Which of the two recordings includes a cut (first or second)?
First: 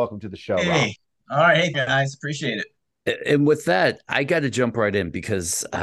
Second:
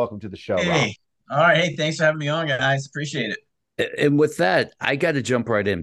first